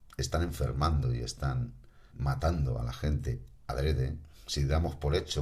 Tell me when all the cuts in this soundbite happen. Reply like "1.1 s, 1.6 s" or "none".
2.1 s